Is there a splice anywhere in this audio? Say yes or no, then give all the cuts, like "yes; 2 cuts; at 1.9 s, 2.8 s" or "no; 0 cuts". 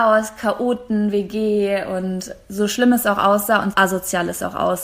yes; 1 cut; at 3.7 s